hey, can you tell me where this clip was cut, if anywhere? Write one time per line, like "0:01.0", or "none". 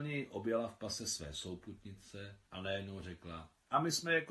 0:02.5